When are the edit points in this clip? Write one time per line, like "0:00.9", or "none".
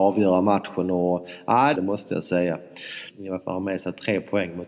0:01.7
0:03.1